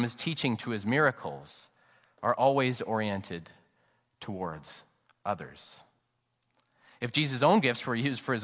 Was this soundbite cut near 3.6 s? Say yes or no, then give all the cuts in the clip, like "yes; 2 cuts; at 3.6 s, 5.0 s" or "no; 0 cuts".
no; 0 cuts